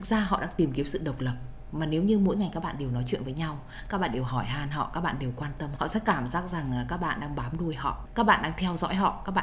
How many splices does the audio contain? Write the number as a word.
one